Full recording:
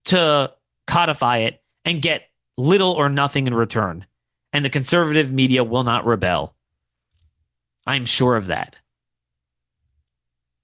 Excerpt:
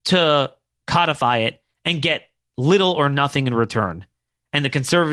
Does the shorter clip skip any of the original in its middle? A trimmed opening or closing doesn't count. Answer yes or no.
no